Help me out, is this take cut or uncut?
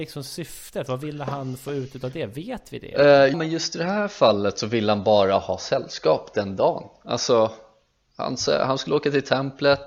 cut